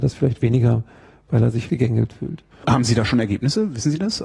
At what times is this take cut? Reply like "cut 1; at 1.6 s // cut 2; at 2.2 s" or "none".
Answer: none

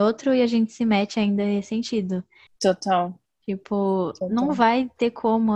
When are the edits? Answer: cut 1; at 2.5 s

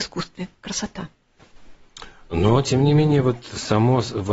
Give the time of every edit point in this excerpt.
none

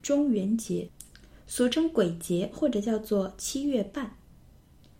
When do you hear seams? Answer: none

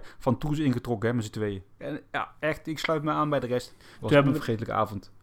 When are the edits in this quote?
cut 1; at 1.8 s // cut 2; at 4.0 s

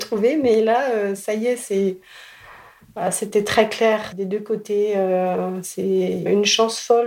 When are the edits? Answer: none

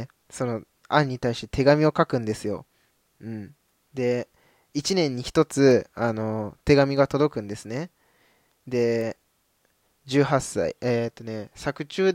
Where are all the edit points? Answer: none

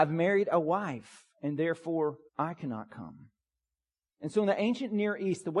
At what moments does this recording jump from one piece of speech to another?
cut 1; at 2.3 s

